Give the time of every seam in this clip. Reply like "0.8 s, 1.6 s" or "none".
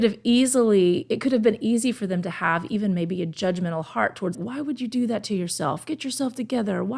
4.3 s